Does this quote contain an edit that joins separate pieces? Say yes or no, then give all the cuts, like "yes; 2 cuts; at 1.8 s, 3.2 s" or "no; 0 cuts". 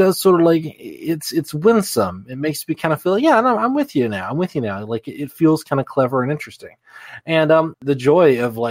yes; 1 cut; at 7.7 s